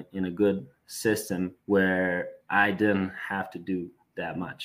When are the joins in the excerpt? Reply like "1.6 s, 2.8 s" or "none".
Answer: 1.6 s